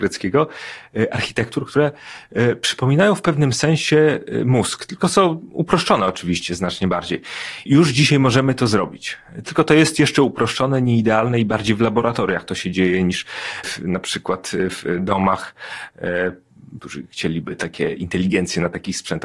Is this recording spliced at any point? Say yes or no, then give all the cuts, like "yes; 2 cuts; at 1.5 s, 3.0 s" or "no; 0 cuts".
yes; 3 cuts; at 7.7 s, 13.6 s, 16.8 s